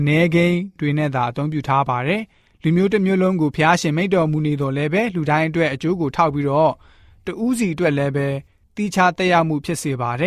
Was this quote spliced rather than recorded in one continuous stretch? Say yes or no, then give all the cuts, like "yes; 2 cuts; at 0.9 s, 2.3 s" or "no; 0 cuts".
no; 0 cuts